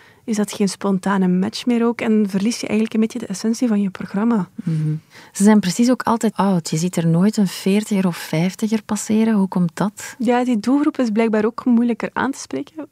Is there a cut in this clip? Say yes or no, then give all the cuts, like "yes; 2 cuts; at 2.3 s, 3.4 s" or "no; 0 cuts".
yes; 1 cut; at 6.3 s